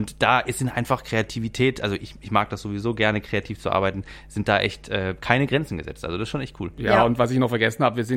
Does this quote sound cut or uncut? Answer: uncut